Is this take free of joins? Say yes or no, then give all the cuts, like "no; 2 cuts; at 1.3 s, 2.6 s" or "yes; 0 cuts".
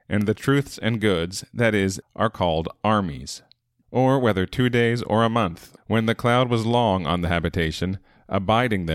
no; 3 cuts; at 2.0 s, 3.8 s, 5.8 s